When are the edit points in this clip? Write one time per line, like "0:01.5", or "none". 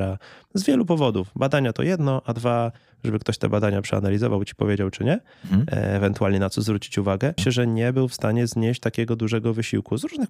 0:04.9
0:07.4